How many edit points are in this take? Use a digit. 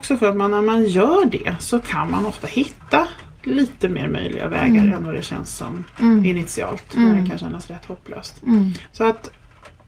0